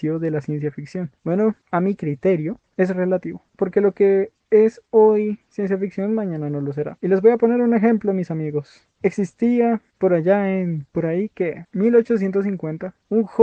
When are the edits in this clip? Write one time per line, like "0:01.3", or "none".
none